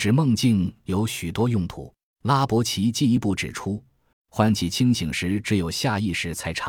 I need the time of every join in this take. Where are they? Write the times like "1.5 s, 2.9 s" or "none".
2.1 s, 4.1 s